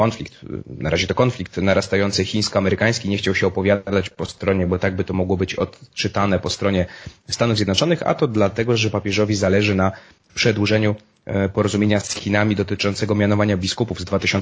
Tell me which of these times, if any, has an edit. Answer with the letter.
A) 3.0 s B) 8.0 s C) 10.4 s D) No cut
D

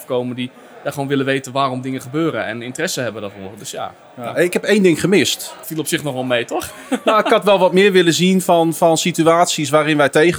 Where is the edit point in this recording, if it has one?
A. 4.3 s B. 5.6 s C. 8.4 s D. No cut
B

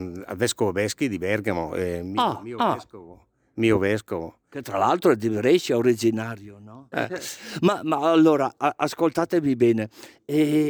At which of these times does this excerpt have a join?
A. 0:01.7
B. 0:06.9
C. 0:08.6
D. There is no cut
B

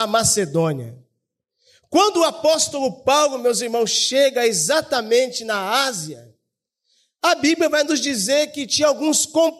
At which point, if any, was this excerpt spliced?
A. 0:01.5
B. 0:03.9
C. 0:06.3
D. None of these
D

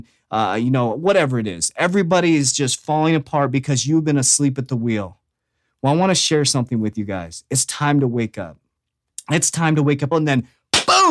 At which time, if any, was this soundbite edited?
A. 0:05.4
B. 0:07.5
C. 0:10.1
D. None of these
C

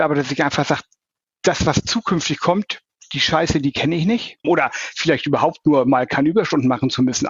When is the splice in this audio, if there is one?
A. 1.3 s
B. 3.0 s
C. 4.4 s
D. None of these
C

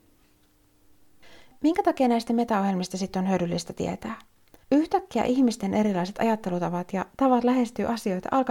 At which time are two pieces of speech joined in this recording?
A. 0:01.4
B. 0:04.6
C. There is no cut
B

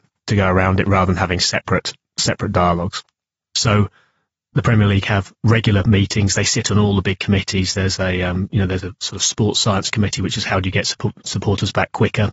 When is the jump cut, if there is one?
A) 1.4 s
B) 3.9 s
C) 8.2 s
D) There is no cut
D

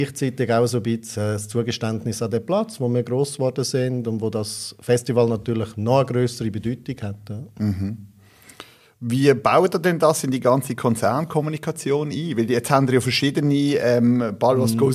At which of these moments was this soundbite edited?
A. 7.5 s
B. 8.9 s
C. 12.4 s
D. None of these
D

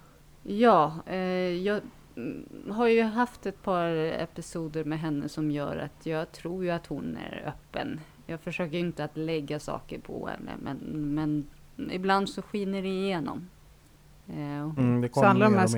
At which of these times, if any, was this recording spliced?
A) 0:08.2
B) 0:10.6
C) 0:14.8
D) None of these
C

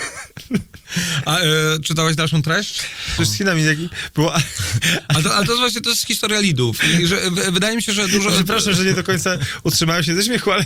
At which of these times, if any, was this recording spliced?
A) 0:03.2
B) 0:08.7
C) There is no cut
A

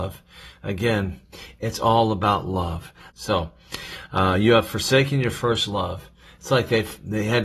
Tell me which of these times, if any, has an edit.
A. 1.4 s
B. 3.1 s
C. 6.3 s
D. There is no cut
B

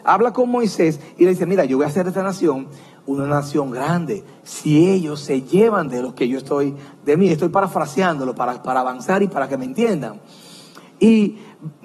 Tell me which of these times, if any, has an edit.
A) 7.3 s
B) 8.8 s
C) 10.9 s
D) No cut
D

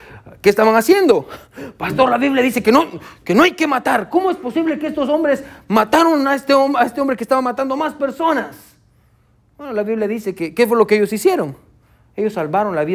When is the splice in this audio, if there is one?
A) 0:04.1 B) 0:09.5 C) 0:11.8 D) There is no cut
D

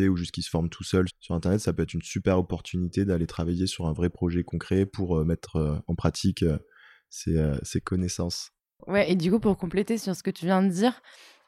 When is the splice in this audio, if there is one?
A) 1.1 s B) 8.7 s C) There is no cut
A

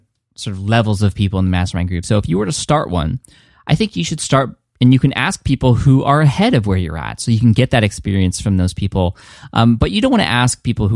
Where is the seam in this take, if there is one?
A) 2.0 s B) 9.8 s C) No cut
A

